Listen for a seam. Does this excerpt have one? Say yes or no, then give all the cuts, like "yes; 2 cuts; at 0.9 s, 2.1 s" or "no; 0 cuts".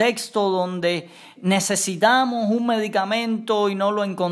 yes; 1 cut; at 1.4 s